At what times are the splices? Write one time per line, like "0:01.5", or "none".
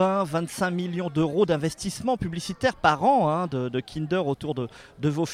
none